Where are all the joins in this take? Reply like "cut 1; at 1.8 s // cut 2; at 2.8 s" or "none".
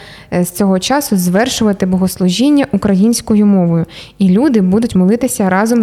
none